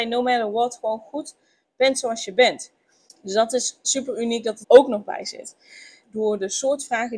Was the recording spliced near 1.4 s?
no; 3 cuts; at 3.1 s, 4.6 s, 6.0 s

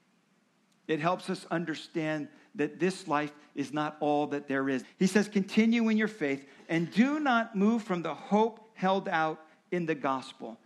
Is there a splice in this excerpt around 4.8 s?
yes; 2 cuts; at 4.8 s, 6.6 s

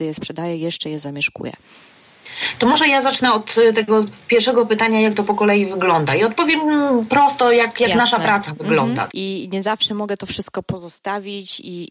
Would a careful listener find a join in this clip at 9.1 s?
yes; 1 cut; at 9.1 s

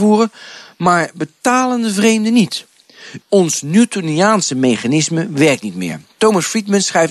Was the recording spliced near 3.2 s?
yes; 1 cut; at 3.2 s

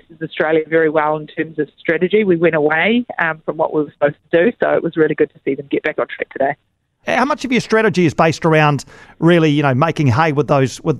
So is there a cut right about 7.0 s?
yes; 1 cut; at 7.0 s

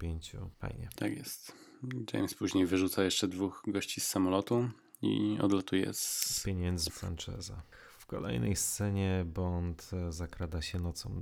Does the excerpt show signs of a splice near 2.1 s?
no; 1 cut; at 6.9 s

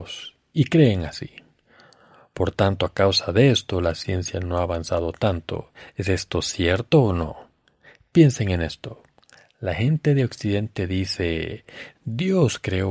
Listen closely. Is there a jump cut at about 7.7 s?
no; 1 cut; at 12.0 s

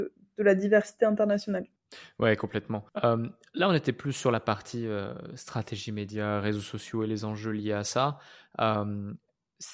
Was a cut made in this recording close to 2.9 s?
yes; 1 cut; at 2.9 s

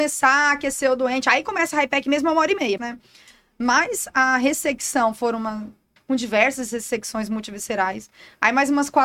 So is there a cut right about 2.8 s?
yes; 2 cuts; at 2.8 s, 6.0 s

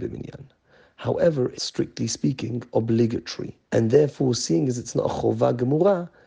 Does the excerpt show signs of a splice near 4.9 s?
no; 2 cuts; at 1.6 s, 3.6 s

